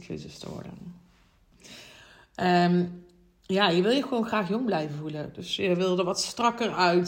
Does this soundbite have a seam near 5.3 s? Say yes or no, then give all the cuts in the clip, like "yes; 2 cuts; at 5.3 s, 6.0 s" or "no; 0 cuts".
no; 1 cut; at 1.5 s